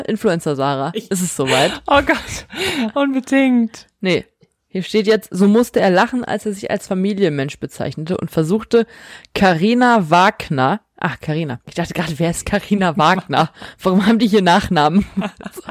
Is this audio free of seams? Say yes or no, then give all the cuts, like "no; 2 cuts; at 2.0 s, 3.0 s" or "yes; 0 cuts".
yes; 0 cuts